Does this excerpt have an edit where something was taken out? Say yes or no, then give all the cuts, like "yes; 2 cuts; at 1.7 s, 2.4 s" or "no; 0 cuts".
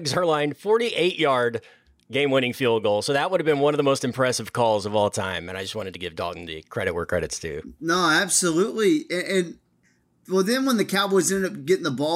no; 0 cuts